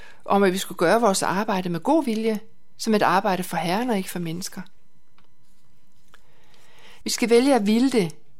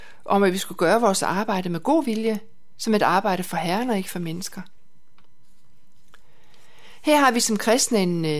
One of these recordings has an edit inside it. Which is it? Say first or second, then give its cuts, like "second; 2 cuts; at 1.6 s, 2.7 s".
first; 1 cut; at 7.0 s